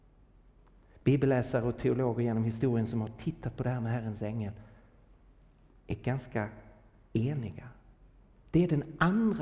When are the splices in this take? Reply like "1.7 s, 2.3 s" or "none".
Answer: 8.4 s